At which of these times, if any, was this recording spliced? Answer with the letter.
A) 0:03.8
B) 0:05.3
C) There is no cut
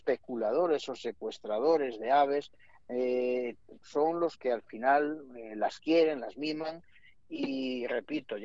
A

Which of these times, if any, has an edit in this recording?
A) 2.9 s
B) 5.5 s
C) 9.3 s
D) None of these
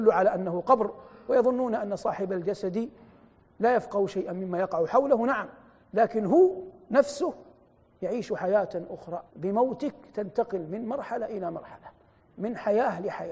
C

